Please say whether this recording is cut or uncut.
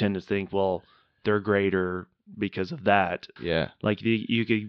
cut